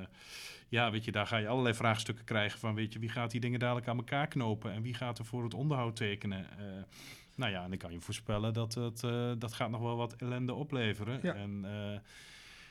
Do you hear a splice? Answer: no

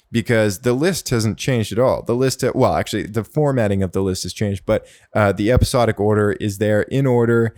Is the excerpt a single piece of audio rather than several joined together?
yes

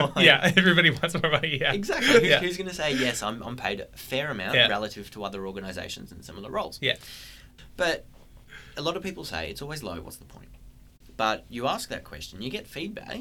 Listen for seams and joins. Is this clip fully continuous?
no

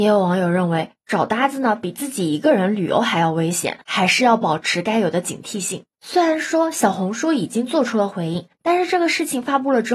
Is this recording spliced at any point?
yes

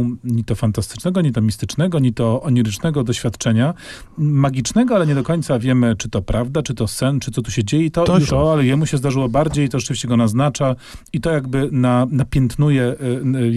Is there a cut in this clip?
yes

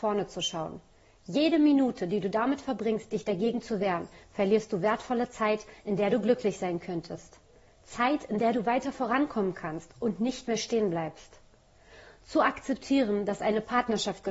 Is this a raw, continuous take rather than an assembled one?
yes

